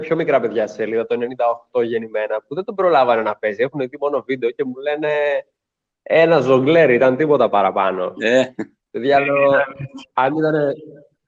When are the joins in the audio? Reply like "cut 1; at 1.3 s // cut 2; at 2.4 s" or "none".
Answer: none